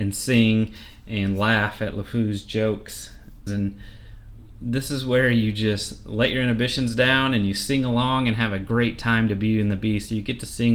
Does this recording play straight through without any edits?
no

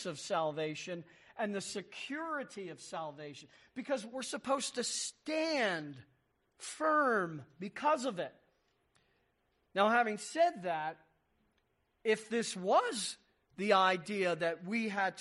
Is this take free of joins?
yes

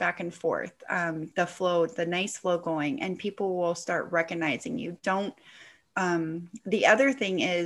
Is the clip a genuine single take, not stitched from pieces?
no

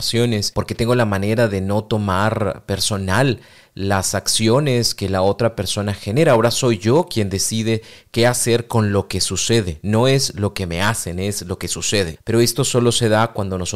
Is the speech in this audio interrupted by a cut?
yes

